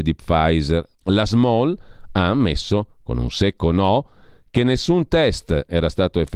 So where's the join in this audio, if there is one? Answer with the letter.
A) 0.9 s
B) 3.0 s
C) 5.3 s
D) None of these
A